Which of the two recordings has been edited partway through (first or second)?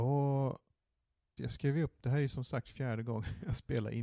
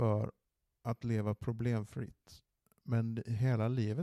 first